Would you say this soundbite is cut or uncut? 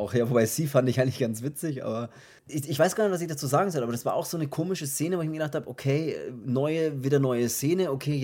uncut